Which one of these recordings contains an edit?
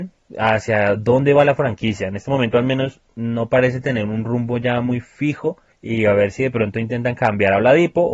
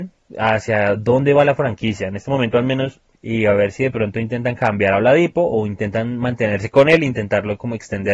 second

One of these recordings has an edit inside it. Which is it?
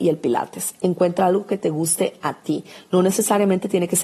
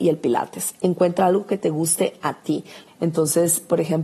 second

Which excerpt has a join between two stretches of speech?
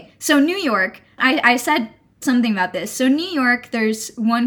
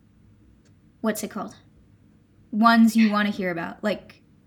first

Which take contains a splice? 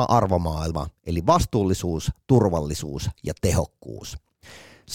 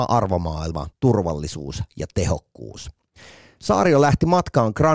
second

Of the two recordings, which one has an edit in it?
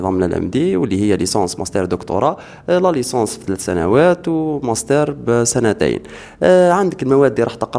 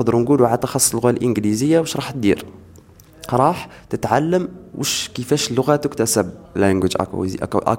second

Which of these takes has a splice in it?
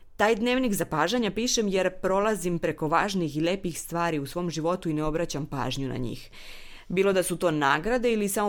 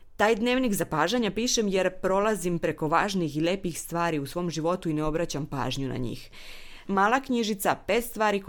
second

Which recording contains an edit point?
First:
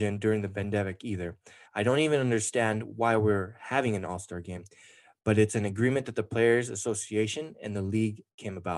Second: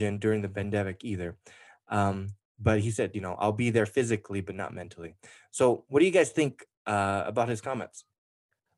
first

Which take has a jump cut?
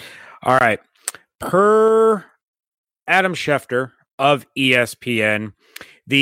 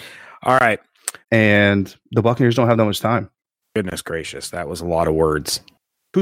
second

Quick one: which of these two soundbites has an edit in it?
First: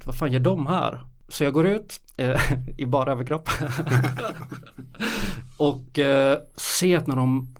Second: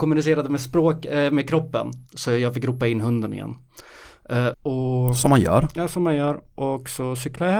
second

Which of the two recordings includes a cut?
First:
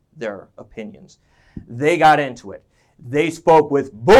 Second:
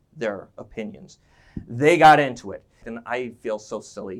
second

